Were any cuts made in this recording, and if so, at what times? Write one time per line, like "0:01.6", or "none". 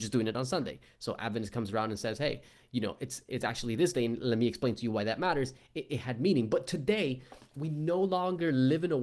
none